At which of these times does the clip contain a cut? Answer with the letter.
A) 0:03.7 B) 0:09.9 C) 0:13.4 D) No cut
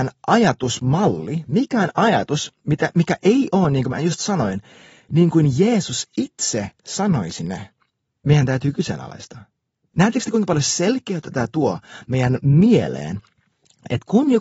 B